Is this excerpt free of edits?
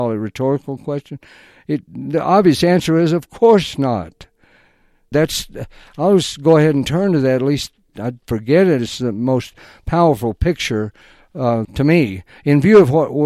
no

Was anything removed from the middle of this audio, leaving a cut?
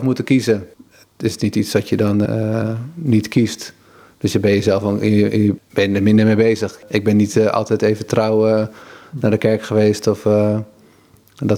yes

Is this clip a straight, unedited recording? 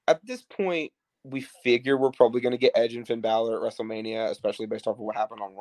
yes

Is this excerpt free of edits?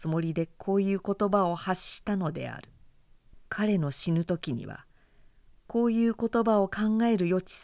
no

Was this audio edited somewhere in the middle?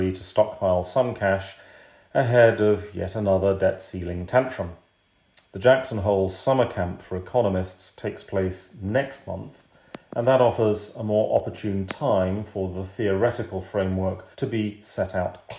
yes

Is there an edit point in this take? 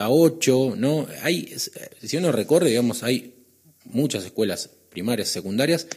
no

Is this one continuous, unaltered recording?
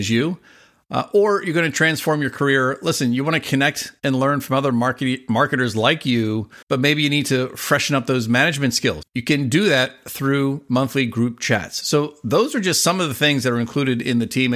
no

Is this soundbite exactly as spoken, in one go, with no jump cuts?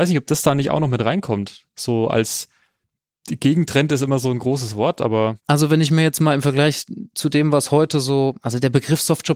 no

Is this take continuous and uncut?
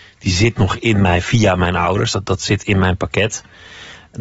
yes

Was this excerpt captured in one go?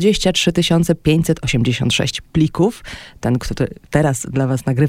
yes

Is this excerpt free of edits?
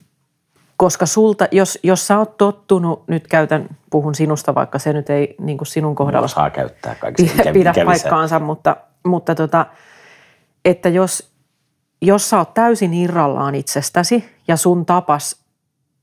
yes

